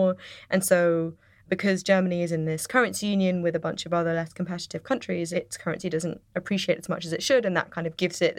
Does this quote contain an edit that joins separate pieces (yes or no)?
no